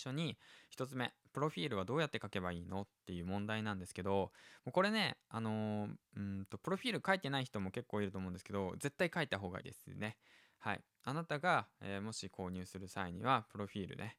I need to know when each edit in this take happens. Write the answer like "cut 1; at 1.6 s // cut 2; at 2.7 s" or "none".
cut 1; at 9.6 s

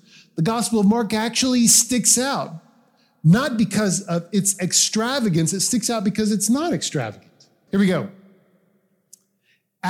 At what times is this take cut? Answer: cut 1; at 7.7 s

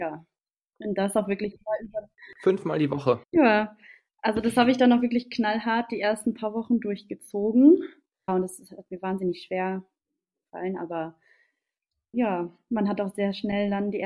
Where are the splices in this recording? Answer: cut 1; at 3.2 s // cut 2; at 8.3 s // cut 3; at 12.1 s

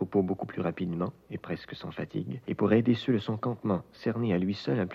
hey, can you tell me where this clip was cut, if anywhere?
cut 1; at 2.4 s

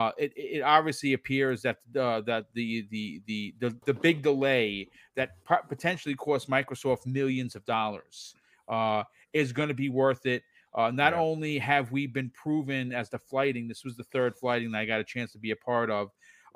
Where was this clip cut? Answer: cut 1; at 3.8 s // cut 2; at 12.9 s

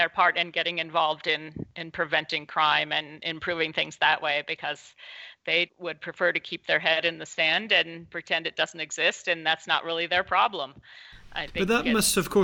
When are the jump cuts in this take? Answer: cut 1; at 5.7 s

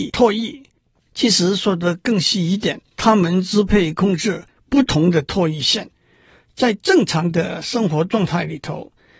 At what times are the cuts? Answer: cut 1; at 2.8 s

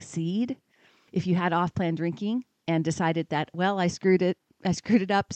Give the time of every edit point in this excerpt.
none

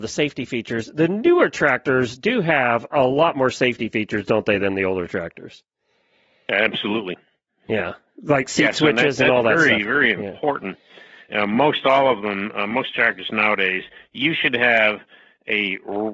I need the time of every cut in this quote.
none

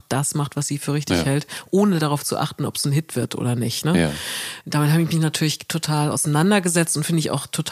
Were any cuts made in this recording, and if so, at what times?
cut 1; at 4.6 s

